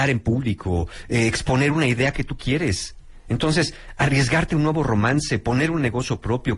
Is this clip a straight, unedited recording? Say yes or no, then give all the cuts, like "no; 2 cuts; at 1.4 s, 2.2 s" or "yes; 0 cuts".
yes; 0 cuts